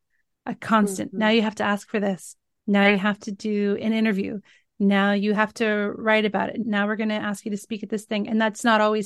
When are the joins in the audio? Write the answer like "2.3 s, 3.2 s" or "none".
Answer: none